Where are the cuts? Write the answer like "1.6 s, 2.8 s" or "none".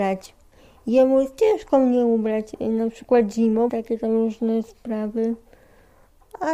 3.7 s